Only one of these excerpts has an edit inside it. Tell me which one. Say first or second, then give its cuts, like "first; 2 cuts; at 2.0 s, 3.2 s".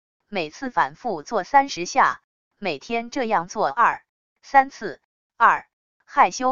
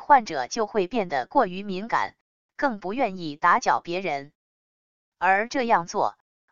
first; 1 cut; at 5.2 s